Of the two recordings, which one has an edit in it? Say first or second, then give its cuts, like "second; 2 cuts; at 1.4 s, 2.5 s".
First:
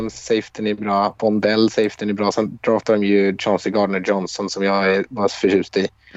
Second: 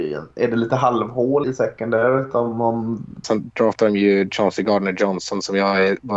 second; 2 cuts; at 1.4 s, 3.2 s